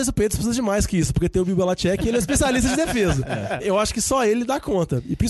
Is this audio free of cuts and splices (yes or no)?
yes